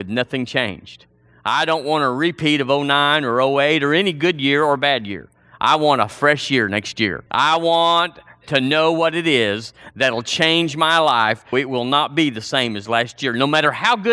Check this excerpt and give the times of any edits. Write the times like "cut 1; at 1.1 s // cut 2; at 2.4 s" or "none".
cut 1; at 7.3 s // cut 2; at 11.5 s